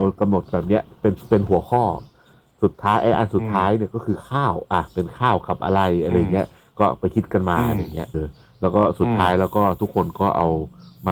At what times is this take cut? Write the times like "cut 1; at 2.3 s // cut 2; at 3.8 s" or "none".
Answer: cut 1; at 8.1 s

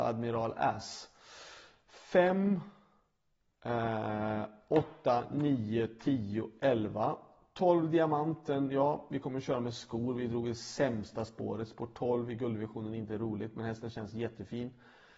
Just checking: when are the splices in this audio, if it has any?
none

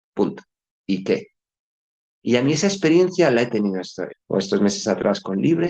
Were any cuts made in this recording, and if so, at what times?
cut 1; at 2.2 s // cut 2; at 4.1 s

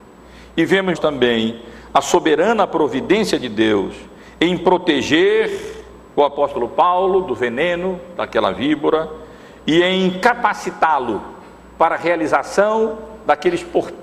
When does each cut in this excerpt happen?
cut 1; at 0.9 s

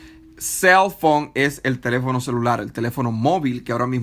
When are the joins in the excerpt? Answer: none

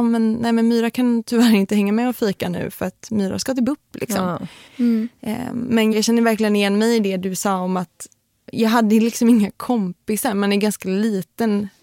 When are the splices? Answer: cut 1; at 4.7 s // cut 2; at 5.9 s

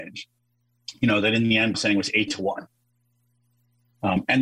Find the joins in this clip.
cut 1; at 1.7 s

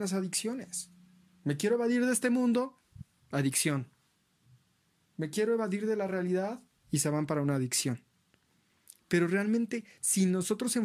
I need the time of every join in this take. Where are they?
none

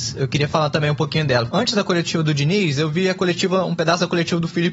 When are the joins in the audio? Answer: cut 1; at 1.5 s

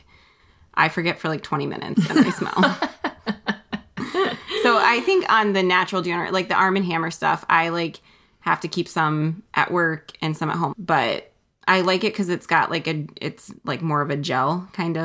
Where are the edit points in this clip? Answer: cut 1; at 10.7 s

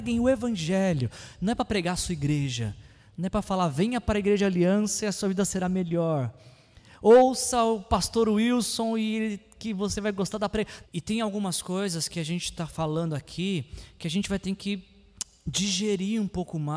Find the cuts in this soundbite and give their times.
cut 1; at 10.8 s

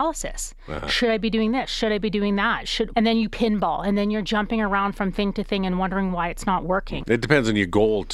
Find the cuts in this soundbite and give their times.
cut 1; at 2.9 s // cut 2; at 7.0 s

